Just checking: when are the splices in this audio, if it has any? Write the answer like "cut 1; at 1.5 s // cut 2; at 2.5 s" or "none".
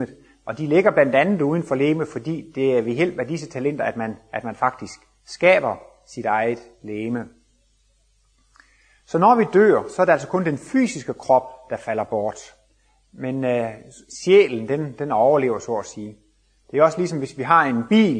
none

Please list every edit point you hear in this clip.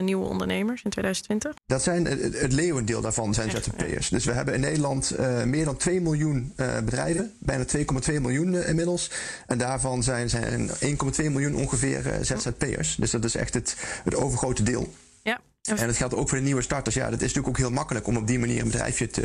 cut 1; at 1.6 s

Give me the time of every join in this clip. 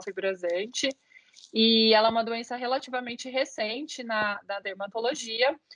none

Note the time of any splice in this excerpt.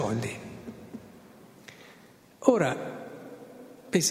none

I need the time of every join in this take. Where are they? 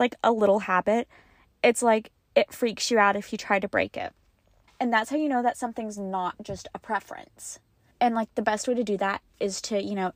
cut 1; at 4.7 s // cut 2; at 7.9 s

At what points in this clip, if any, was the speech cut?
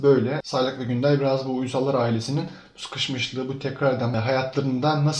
none

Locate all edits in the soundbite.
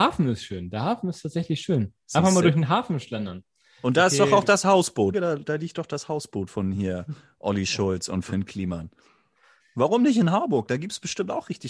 cut 1; at 5.1 s // cut 2; at 9.6 s

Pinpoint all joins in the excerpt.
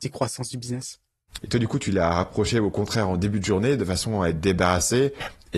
cut 1; at 1.4 s

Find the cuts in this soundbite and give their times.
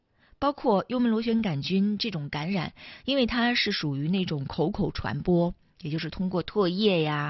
none

